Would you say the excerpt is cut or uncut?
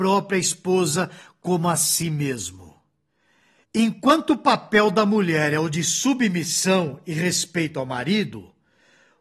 uncut